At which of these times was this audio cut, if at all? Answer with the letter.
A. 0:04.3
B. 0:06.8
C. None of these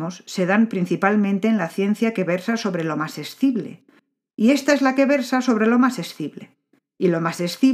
A